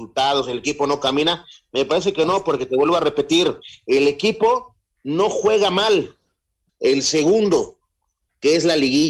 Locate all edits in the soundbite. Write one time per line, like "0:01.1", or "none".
0:06.7